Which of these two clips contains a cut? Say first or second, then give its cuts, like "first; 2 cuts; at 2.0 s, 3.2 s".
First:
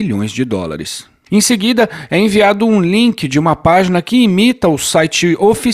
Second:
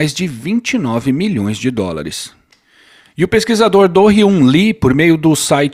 first; 1 cut; at 1.3 s